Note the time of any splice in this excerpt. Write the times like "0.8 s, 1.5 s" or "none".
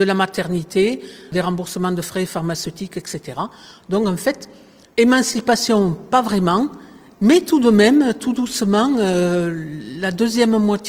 none